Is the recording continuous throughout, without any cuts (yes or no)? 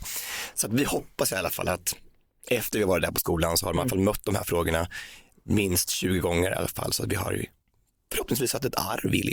yes